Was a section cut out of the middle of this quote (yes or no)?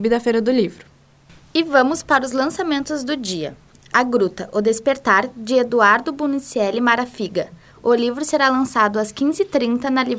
no